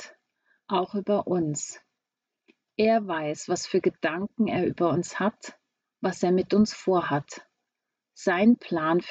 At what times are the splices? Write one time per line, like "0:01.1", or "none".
none